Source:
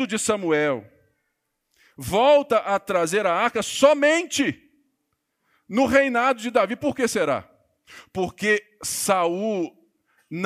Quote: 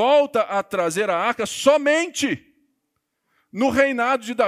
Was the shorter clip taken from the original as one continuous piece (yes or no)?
yes